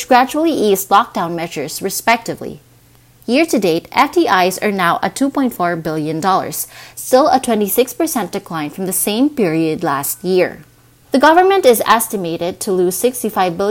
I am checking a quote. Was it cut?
yes; 1 cut; at 11.0 s

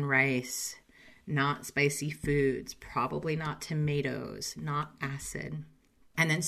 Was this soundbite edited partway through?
no; 0 cuts

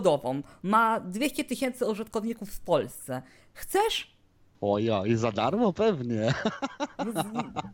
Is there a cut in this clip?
yes; 1 cut; at 4.5 s

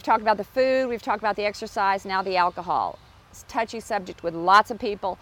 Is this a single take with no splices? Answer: yes; 0 cuts

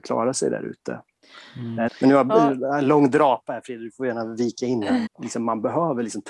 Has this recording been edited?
yes; 2 cuts; at 1.9 s, 5.1 s

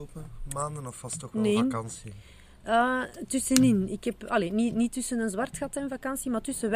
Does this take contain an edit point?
no; 0 cuts

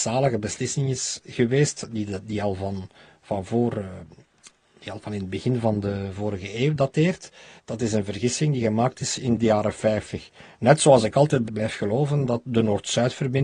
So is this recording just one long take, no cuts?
no; 2 cuts; at 7.6 s, 11.5 s

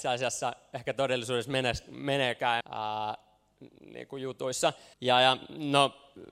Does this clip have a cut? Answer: yes; 2 cuts; at 2.6 s, 4.9 s

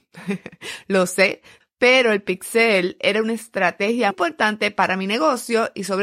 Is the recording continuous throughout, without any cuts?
no; 2 cuts; at 1.6 s, 4.1 s

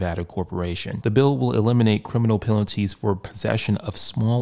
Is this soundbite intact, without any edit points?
no; 1 cut; at 1.0 s

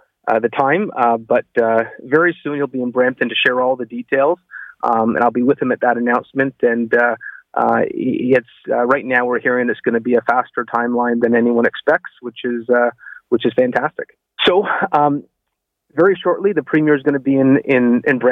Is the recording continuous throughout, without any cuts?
no; 2 cuts; at 11.2 s, 14.4 s

